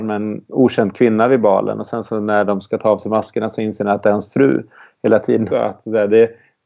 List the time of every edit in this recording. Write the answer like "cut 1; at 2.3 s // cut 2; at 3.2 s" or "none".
cut 1; at 5.5 s

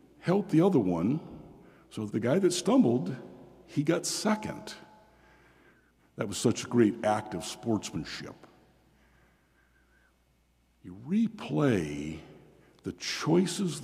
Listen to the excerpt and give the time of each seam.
cut 1; at 2.1 s // cut 2; at 6.0 s

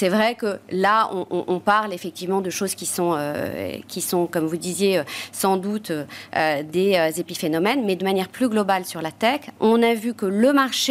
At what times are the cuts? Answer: cut 1; at 9.6 s

